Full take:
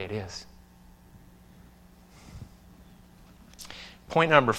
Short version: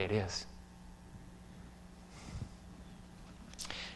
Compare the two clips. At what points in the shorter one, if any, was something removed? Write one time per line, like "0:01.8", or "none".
none